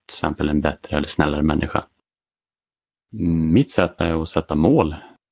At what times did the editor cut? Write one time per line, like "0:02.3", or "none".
0:04.0